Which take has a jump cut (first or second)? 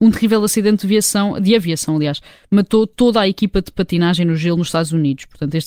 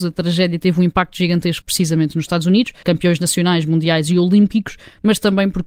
second